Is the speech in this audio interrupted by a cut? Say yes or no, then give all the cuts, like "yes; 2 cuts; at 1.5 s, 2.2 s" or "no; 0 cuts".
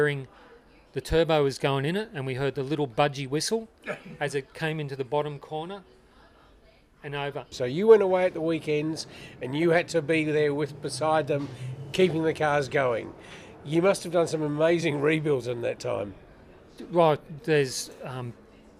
yes; 2 cuts; at 7.5 s, 17.4 s